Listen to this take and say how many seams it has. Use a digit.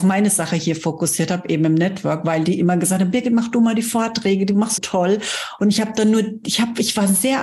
1